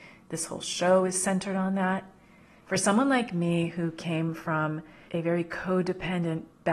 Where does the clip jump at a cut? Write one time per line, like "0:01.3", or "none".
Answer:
0:02.6
0:05.1